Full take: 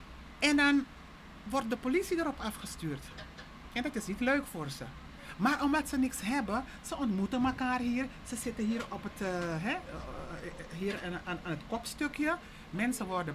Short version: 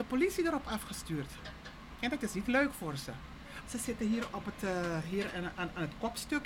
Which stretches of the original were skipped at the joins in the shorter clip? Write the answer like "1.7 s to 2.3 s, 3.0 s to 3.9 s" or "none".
5.4 s to 8.2 s, 9.6 s to 10.7 s